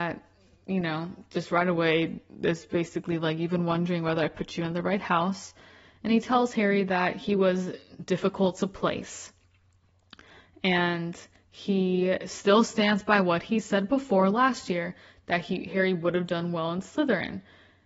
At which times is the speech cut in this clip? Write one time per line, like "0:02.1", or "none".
none

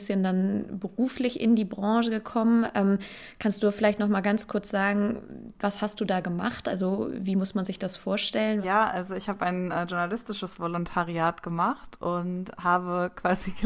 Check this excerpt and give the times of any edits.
0:08.6

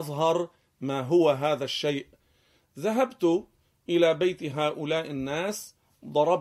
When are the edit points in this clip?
none

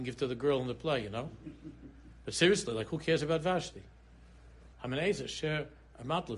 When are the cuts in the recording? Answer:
0:04.7

